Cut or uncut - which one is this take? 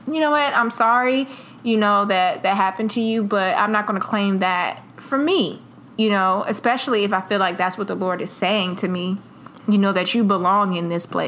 uncut